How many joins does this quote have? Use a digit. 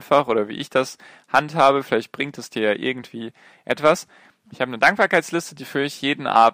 1